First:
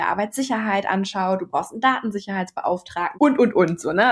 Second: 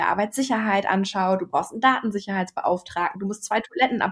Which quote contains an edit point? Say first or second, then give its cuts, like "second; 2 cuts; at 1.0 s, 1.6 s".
first; 1 cut; at 3.1 s